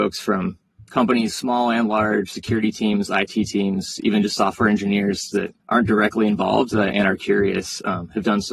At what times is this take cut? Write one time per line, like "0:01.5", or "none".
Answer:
0:05.6